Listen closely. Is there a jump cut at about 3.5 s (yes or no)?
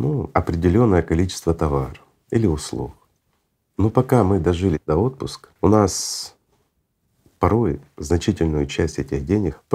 no